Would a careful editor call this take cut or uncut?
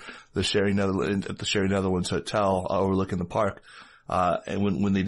uncut